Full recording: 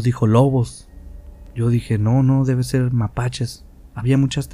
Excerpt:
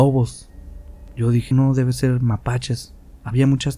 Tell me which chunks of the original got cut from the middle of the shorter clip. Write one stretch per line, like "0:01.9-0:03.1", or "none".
0:01.9-0:02.2